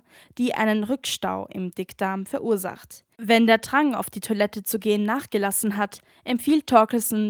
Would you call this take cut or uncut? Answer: cut